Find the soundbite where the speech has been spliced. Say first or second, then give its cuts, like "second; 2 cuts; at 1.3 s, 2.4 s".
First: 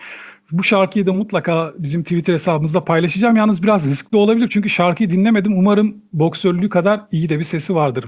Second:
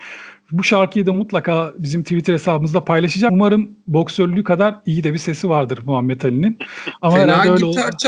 second; 1 cut; at 3.3 s